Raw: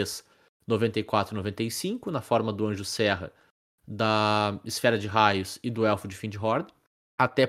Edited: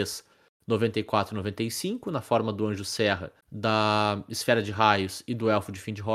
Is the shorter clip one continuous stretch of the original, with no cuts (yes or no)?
no